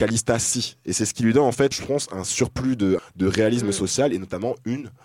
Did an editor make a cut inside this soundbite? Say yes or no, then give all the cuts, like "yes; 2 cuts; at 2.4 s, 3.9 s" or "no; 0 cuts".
yes; 2 cuts; at 1.7 s, 3.0 s